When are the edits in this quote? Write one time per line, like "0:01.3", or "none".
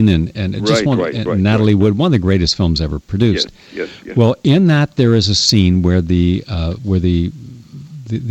none